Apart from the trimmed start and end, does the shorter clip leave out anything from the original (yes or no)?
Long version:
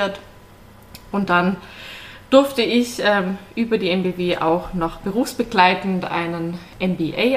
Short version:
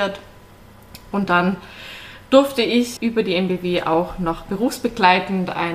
yes